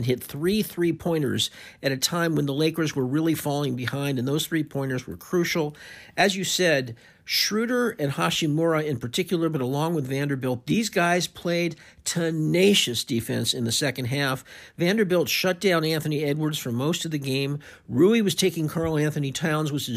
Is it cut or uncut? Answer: uncut